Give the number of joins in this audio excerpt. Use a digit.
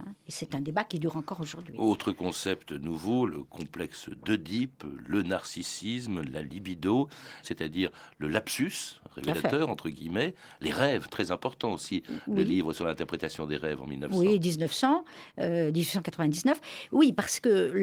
1